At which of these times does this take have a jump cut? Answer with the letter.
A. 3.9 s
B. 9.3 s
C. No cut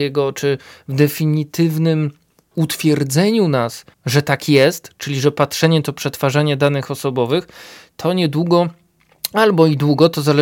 A